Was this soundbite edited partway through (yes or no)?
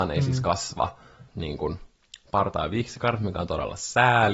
yes